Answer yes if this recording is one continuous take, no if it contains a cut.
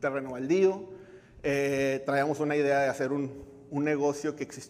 yes